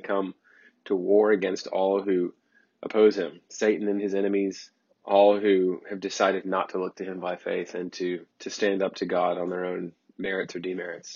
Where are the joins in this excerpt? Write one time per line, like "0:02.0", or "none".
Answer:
0:04.9
0:08.3